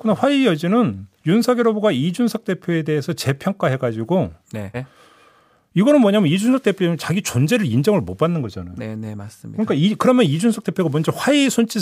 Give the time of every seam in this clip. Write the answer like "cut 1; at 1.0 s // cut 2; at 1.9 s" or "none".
cut 1; at 1.1 s // cut 2; at 4.7 s